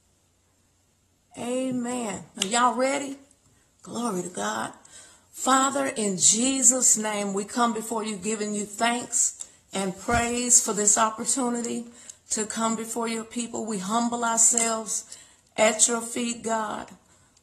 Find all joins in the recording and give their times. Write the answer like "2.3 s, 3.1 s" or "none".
2.4 s